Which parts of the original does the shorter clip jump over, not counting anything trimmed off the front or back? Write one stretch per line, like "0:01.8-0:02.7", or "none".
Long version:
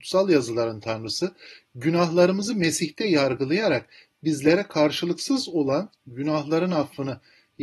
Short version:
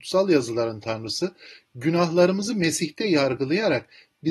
none